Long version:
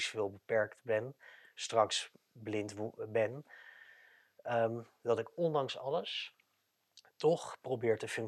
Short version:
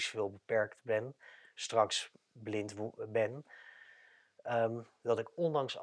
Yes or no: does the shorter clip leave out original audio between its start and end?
no